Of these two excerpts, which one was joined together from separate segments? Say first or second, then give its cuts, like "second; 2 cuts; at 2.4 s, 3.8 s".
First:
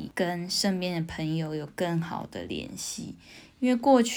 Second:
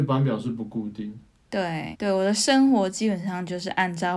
second; 1 cut; at 1.9 s